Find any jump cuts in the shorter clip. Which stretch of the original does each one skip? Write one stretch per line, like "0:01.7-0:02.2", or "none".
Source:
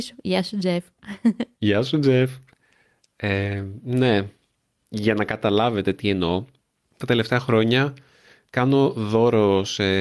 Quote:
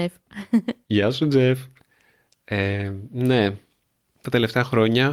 0:04.8-0:06.8

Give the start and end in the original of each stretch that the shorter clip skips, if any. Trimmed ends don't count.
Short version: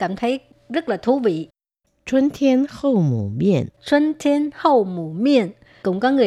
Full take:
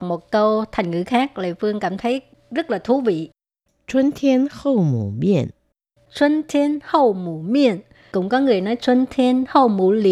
0:05.6-0:06.0

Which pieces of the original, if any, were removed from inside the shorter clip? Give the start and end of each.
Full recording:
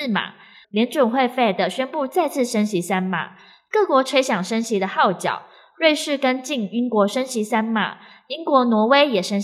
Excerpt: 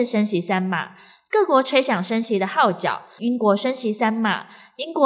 0:05.6-0:06.7

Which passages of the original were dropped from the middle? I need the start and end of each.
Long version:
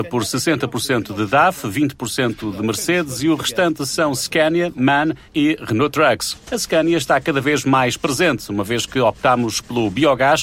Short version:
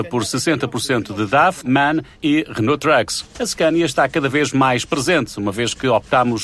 0:01.6-0:04.7

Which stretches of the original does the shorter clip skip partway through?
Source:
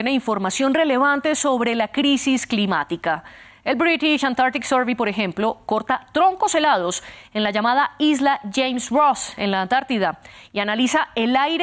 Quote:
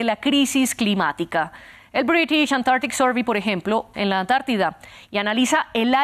0:05.7-0:09.4

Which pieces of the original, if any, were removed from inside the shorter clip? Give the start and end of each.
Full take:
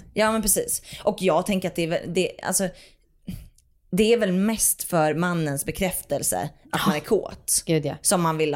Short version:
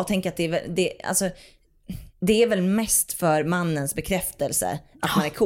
0:03.5-0:03.8

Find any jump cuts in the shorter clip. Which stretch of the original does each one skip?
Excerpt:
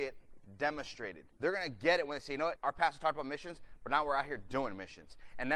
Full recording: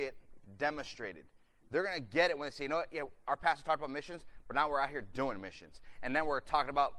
0:01.3-0:01.6
0:02.9-0:03.2

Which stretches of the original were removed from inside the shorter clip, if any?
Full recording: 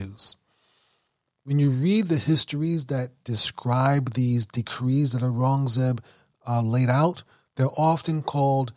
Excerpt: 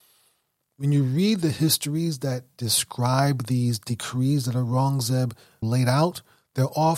0:06.3-0:06.6

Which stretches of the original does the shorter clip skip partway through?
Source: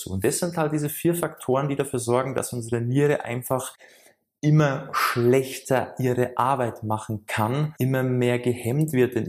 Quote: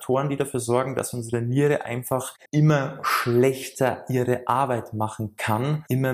0:03.8-0:04.4

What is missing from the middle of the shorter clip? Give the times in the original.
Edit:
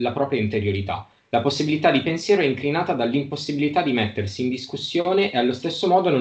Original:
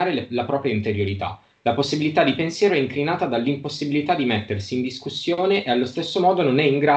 none

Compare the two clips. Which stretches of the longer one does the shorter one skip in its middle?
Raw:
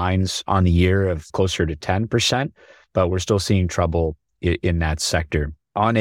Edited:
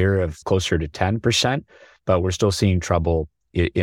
none

